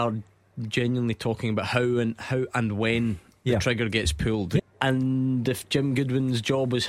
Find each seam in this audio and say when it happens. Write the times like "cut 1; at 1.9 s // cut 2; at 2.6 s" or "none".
cut 1; at 4.6 s